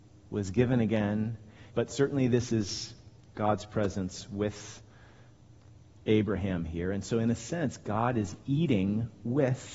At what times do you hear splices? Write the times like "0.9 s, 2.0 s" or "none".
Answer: 1.7 s